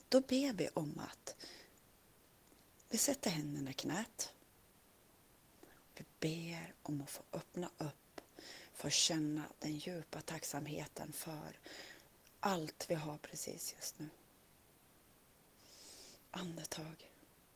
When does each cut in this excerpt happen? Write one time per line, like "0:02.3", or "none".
none